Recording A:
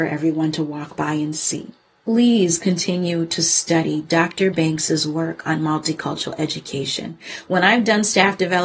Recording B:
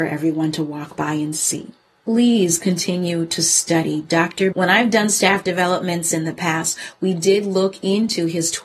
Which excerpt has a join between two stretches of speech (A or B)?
B